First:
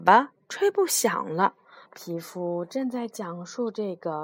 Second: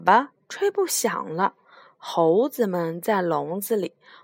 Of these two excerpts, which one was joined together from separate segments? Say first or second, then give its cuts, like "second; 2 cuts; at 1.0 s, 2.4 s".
first; 1 cut; at 1.8 s